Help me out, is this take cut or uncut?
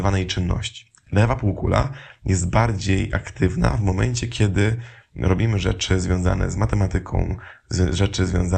uncut